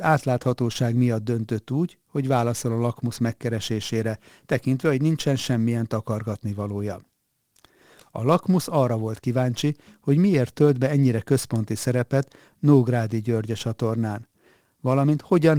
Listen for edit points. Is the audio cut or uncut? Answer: uncut